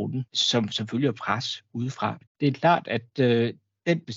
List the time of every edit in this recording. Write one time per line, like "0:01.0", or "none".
0:02.3